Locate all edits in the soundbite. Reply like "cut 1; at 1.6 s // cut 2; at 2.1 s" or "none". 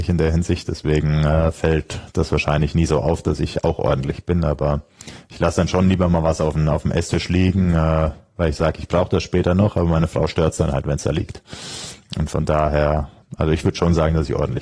none